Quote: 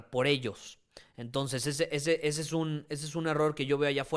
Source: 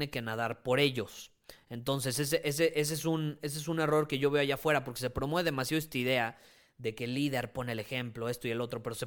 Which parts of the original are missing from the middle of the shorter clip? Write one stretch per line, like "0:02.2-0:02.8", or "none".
none